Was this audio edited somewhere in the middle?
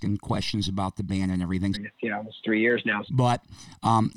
yes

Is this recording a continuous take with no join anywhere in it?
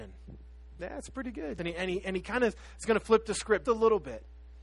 no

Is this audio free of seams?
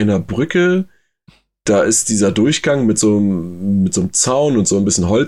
yes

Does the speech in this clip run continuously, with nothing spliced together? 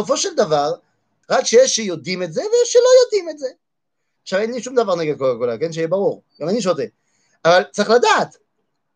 no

